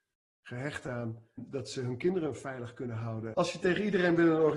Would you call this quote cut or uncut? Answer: cut